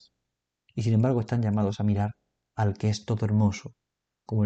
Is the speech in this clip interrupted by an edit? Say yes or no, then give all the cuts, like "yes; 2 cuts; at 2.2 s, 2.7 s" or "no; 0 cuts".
no; 0 cuts